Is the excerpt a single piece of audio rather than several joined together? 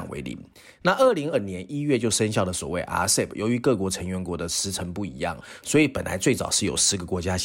no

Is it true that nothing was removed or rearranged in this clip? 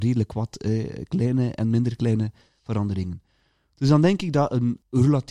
yes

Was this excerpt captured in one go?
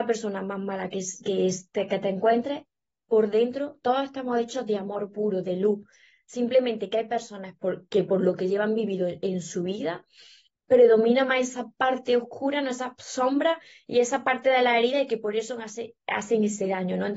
no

